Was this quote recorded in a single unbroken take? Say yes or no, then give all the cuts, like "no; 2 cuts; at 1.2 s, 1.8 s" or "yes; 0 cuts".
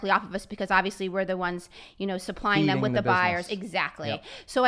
yes; 0 cuts